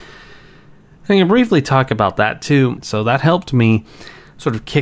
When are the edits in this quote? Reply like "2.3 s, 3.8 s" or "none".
2.8 s